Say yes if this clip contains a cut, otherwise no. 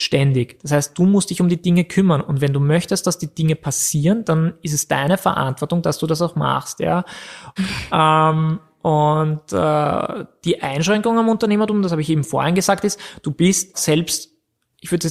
yes